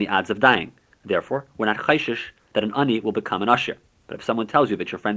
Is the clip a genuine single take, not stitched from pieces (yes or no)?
no